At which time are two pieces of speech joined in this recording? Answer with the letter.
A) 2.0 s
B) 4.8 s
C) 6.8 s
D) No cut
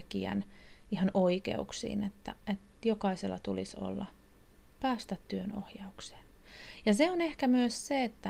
B